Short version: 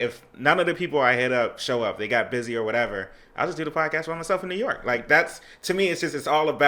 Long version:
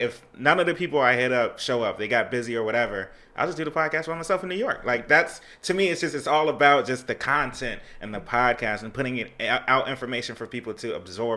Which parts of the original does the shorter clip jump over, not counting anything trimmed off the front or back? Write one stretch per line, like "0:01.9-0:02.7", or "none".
none